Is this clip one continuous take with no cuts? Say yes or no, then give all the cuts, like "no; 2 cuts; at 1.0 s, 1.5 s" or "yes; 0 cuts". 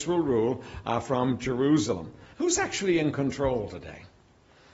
no; 1 cut; at 2.3 s